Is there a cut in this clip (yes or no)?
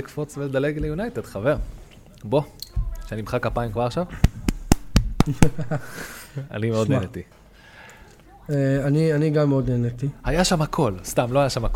no